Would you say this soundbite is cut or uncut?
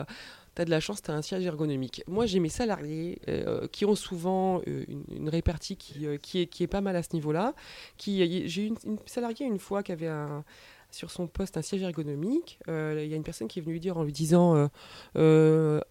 uncut